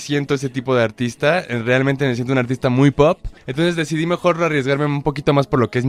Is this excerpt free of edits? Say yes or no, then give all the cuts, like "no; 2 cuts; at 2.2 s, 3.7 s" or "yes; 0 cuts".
yes; 0 cuts